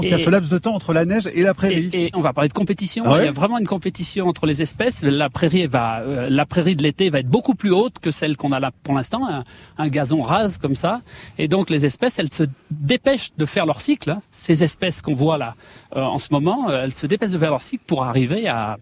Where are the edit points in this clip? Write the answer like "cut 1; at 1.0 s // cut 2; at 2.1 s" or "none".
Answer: cut 1; at 2.1 s